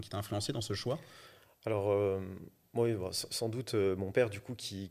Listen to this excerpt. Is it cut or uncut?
uncut